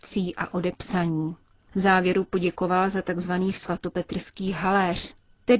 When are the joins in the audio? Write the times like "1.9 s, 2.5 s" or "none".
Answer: none